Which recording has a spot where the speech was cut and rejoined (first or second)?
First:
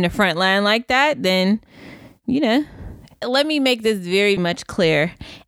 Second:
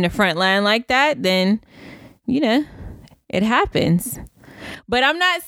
first